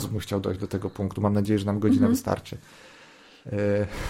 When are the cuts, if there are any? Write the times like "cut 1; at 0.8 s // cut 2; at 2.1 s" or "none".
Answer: none